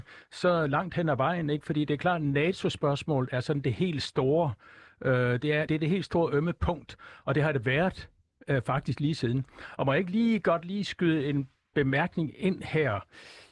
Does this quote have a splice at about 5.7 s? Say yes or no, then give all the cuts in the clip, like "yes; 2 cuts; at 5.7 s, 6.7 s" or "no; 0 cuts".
yes; 1 cut; at 5.7 s